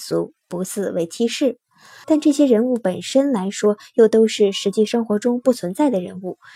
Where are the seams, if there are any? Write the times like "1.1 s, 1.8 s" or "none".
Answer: 2.0 s